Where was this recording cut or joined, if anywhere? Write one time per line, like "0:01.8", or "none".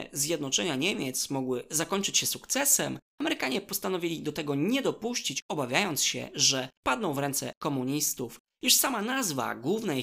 none